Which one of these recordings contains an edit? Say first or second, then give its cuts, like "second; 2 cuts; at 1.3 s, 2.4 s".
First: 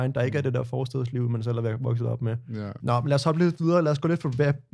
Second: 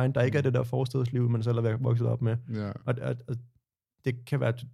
first; 1 cut; at 2.8 s